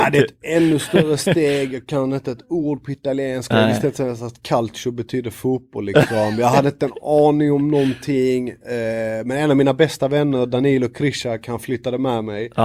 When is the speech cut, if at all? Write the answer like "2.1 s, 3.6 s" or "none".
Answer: none